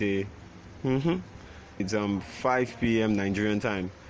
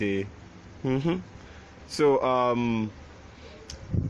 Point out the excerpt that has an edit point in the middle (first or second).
first